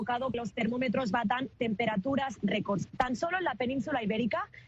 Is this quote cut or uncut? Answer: uncut